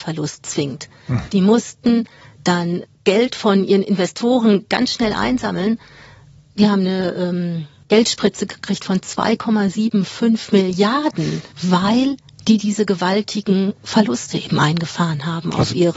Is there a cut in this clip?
yes; 2 cuts; at 2.8 s, 11.5 s

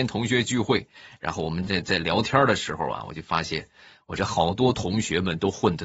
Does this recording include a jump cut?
no; 0 cuts

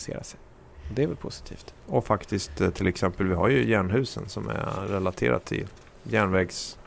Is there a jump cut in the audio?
no; 0 cuts

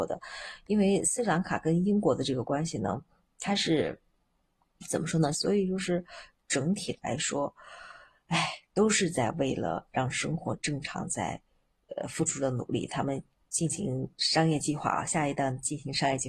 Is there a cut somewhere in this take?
yes; 1 cut; at 5.3 s

